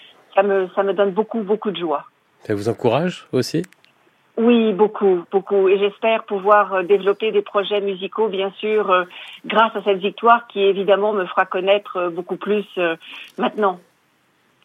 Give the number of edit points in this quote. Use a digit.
0